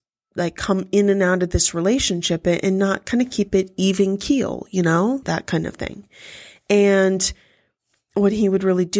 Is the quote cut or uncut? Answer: cut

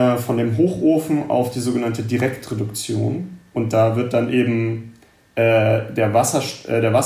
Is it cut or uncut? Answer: uncut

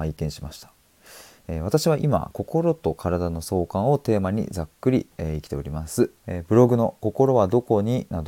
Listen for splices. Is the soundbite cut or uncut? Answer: cut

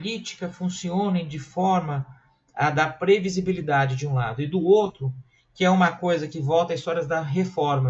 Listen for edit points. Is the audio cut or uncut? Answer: uncut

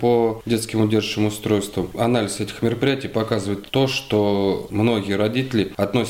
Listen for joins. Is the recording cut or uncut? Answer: uncut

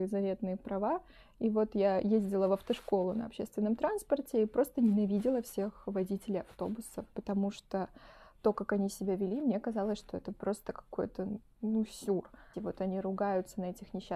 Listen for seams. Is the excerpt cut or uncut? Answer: cut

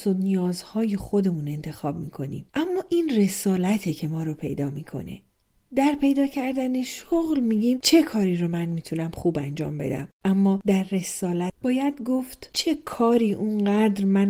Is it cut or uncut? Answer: uncut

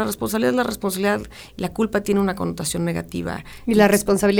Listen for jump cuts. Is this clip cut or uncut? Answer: uncut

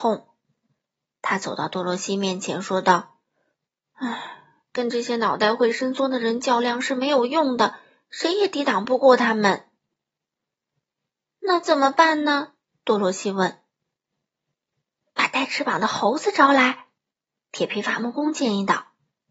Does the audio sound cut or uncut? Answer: uncut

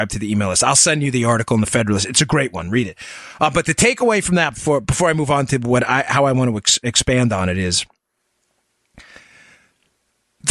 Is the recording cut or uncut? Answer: uncut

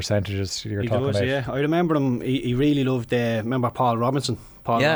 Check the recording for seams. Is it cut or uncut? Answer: uncut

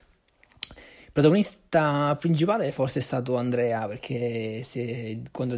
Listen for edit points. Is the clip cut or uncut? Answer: uncut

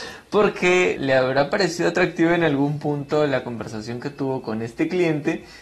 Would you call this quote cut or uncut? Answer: cut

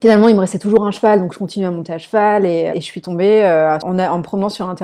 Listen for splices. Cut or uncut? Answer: cut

